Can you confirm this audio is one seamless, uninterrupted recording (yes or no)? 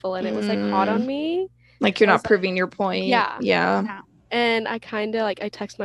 yes